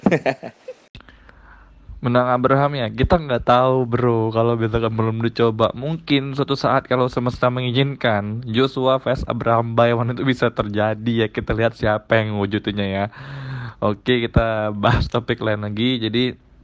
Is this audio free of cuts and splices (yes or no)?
yes